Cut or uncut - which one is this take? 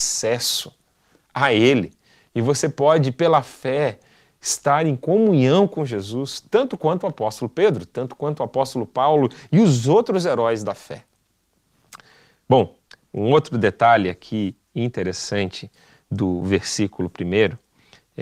uncut